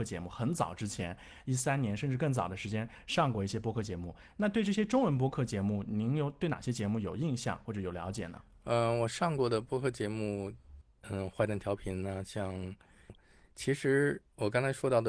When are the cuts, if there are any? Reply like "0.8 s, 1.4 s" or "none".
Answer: 10.8 s, 13.1 s